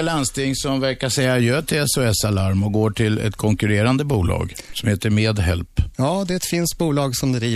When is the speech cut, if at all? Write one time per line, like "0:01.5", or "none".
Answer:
0:05.9